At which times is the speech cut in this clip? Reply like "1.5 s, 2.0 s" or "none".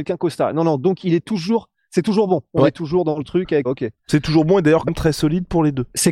3.6 s, 4.9 s